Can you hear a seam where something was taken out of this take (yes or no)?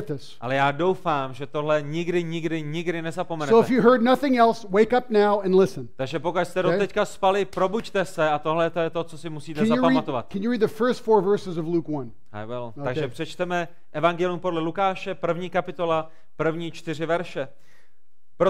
no